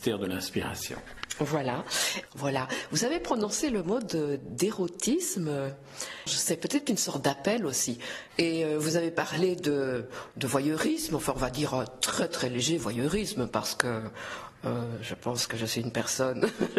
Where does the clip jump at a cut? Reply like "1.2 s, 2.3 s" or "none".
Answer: 2.3 s, 6.3 s, 8.3 s